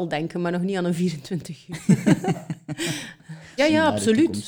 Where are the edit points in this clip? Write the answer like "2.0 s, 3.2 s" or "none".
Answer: 3.6 s